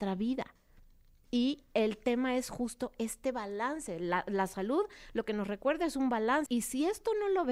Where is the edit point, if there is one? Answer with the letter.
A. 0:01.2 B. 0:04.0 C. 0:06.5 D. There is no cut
C